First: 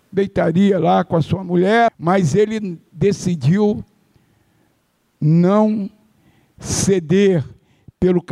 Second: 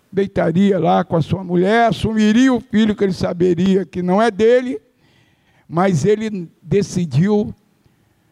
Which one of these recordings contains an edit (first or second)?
first